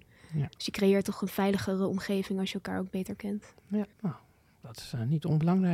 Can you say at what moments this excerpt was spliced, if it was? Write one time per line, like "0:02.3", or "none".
0:03.9